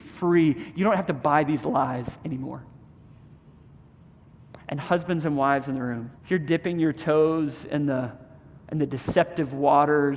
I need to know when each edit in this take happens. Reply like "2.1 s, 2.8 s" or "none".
6.1 s, 8.6 s